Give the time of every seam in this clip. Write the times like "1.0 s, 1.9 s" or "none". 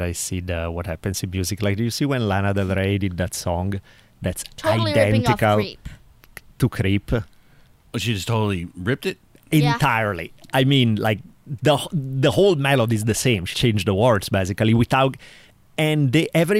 13.5 s